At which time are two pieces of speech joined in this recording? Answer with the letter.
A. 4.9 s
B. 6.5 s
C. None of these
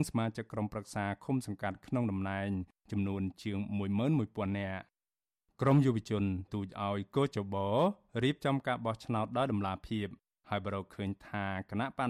B